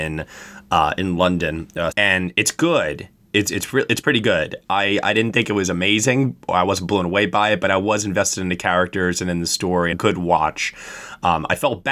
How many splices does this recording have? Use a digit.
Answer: 2